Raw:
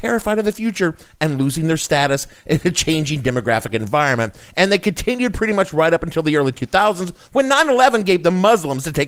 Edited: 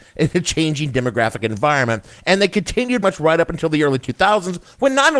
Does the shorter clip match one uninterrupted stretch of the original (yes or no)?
no